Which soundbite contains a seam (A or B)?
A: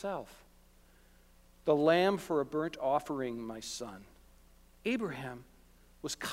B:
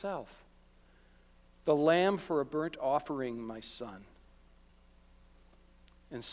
A